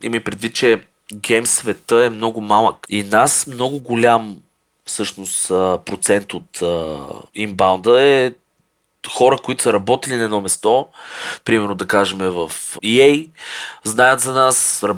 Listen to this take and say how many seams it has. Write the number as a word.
three